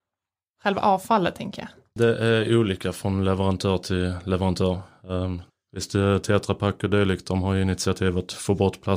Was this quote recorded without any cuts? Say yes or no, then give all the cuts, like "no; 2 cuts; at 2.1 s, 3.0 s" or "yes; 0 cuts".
no; 2 cuts; at 2.0 s, 5.5 s